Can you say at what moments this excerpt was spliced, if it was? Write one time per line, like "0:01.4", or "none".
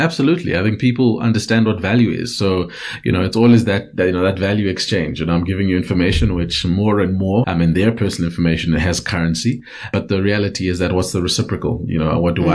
0:07.4